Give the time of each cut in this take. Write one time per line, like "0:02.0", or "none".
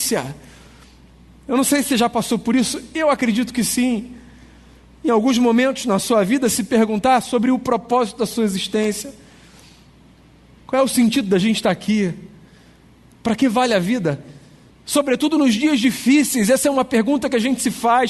0:14.7